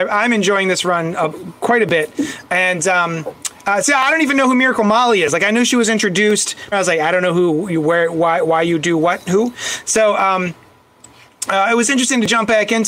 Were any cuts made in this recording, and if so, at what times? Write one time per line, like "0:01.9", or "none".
0:06.7